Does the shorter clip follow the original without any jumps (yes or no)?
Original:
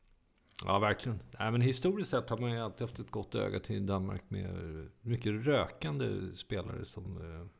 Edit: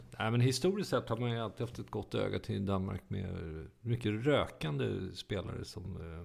yes